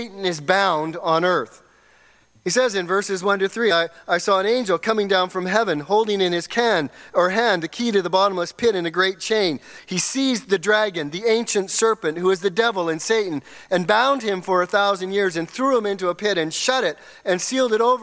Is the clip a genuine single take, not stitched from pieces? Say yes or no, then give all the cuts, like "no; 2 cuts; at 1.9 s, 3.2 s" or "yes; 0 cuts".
yes; 0 cuts